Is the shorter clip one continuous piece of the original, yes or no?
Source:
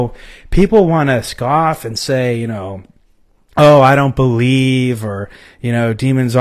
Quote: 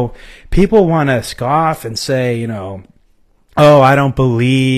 yes